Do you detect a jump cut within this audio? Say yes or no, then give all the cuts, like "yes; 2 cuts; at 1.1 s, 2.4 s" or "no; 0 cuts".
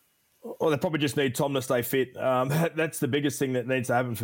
no; 0 cuts